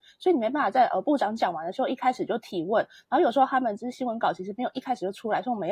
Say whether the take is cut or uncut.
uncut